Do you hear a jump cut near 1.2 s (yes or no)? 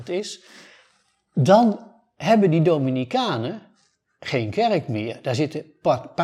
no